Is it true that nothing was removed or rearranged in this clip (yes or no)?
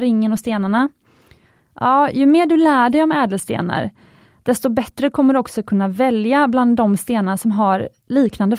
no